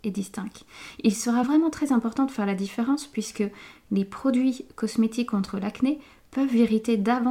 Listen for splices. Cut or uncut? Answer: uncut